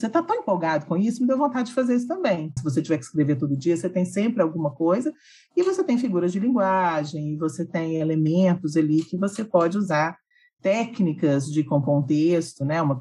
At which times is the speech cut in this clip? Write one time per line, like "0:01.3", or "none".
0:02.6

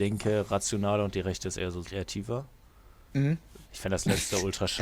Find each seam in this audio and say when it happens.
0:01.8
0:03.6

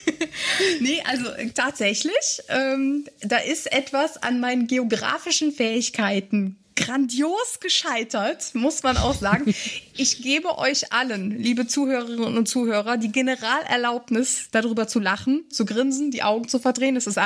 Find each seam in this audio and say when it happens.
0:15.5

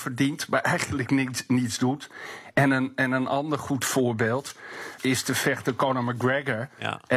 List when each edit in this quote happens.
0:05.0

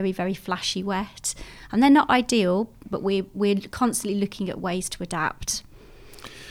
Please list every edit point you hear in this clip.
0:02.8

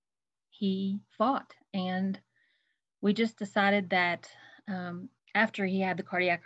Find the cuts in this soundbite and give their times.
0:05.2

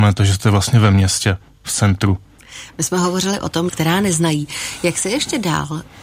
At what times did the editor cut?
0:03.7

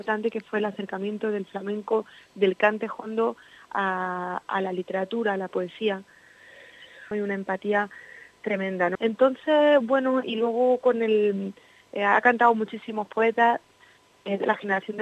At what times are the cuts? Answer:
0:07.1
0:09.0

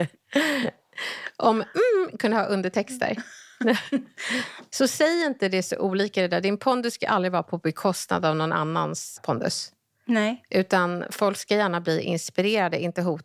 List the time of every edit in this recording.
0:09.2

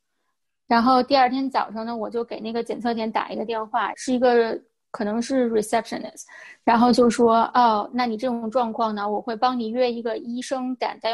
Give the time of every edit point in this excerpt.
0:03.9

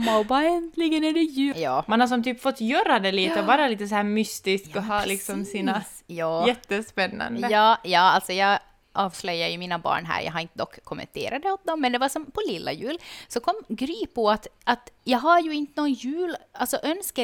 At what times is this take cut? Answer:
0:01.5

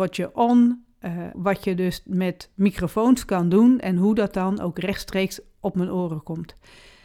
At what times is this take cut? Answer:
0:01.3

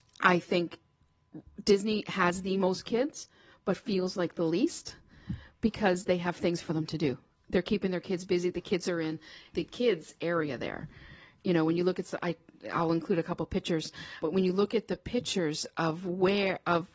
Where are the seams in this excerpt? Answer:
0:09.5
0:14.2

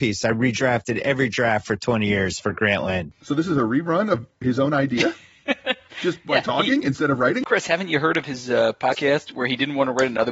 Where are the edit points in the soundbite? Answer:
none

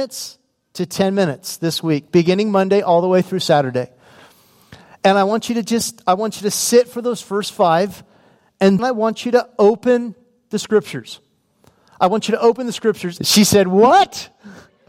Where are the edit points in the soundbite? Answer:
0:08.8
0:13.2

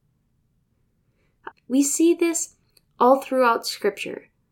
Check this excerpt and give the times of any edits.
0:01.5

